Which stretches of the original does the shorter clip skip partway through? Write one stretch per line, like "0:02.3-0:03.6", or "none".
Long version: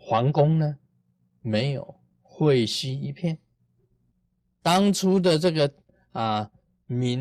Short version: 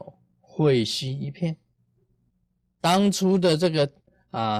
none